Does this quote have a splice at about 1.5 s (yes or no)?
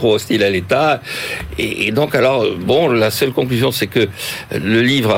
no